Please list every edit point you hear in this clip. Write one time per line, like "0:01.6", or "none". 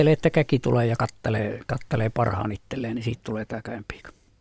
none